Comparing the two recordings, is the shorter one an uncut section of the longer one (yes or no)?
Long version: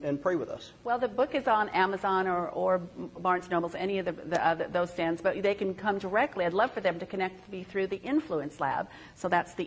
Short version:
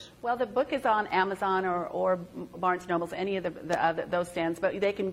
yes